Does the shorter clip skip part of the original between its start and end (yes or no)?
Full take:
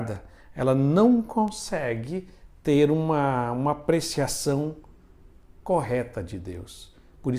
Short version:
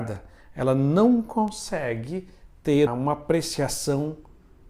yes